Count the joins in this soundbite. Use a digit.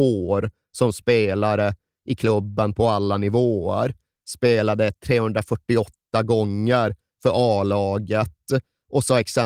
0